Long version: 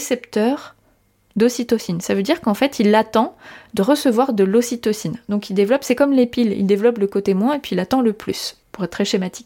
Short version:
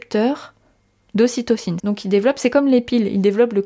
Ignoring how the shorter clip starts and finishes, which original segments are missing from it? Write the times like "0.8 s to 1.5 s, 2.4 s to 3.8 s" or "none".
2.0 s to 5.2 s